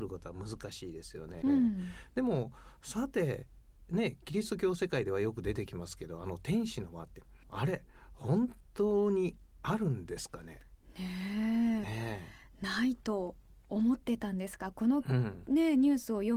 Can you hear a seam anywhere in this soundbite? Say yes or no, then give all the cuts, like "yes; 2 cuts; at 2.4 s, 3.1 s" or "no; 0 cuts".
yes; 2 cuts; at 1.4 s, 7.4 s